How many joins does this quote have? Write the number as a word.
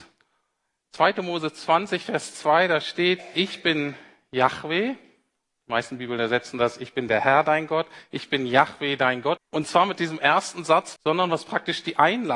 two